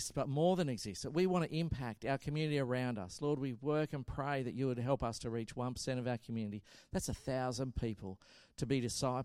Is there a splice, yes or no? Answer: no